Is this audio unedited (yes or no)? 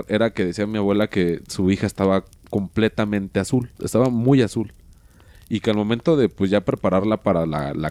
no